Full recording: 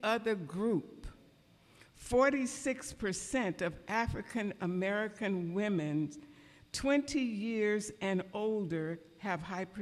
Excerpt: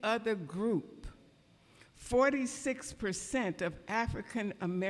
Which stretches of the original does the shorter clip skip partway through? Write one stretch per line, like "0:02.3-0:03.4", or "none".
none